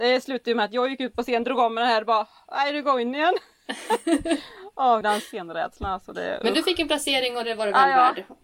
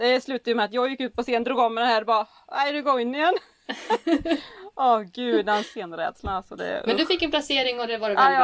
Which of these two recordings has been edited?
first; 1 cut; at 5.0 s

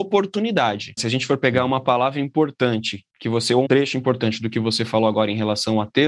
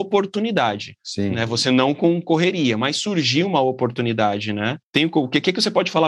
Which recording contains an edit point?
first; 2 cuts; at 1.0 s, 3.7 s

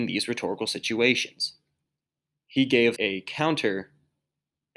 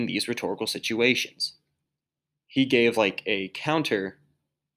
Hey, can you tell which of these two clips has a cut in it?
first; 1 cut; at 3.0 s

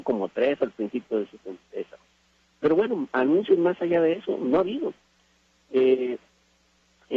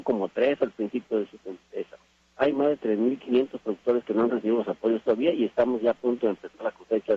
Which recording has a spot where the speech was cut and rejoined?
second; 1 cut; at 2.2 s

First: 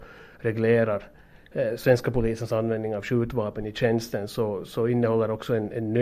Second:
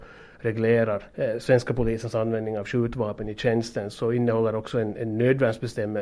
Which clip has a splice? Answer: second; 2 cuts; at 1.1 s, 3.9 s

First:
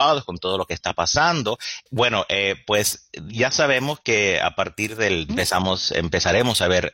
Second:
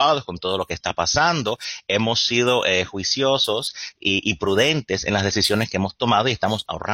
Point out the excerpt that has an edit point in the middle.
first; 2 cuts; at 1.9 s, 5.3 s

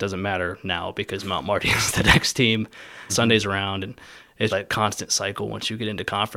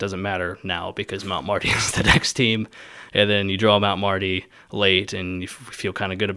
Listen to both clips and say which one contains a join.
first; 2 cuts; at 3.1 s, 4.5 s

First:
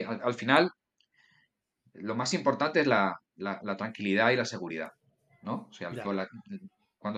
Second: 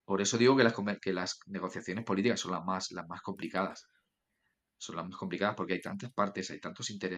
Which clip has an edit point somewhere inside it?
first; 1 cut; at 6.0 s

